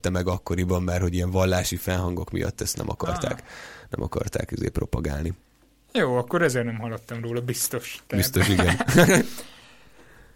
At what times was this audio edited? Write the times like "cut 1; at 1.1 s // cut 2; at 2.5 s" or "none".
none